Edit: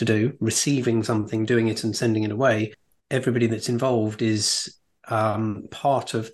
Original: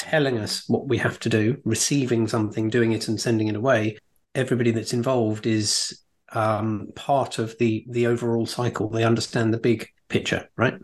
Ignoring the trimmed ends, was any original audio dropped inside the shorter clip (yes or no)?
no